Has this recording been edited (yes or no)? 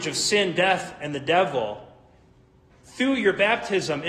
yes